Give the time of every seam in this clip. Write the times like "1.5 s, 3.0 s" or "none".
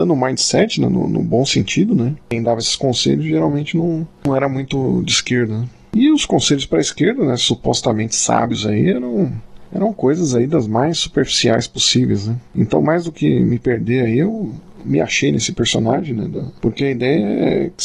2.2 s